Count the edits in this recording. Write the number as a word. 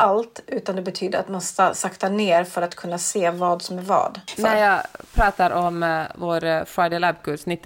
one